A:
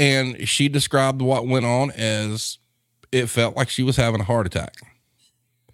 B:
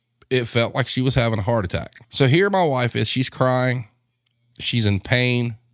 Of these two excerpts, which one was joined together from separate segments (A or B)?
B